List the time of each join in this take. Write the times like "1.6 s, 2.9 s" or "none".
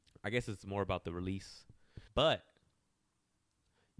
2.1 s